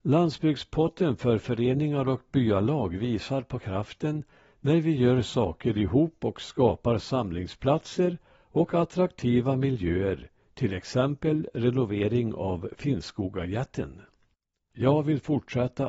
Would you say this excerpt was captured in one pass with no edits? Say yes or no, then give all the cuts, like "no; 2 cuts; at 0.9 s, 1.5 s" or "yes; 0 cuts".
no; 1 cut; at 14.7 s